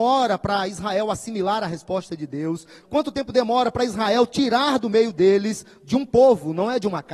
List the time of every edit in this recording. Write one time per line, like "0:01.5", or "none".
0:02.8